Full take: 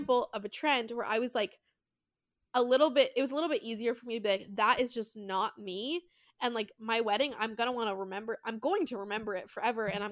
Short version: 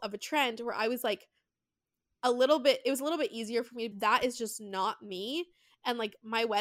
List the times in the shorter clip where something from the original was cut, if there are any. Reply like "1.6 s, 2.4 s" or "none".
3.9 s